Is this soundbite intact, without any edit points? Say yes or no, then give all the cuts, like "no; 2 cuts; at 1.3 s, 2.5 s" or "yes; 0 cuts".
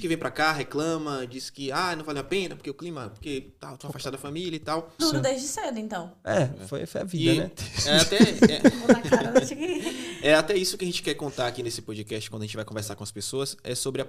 no; 1 cut; at 5.0 s